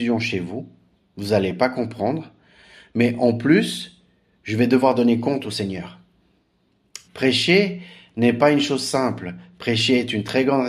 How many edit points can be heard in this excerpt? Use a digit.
1